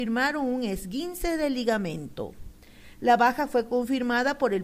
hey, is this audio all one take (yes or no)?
yes